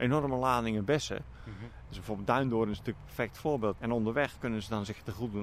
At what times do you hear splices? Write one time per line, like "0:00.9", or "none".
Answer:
0:01.9
0:03.8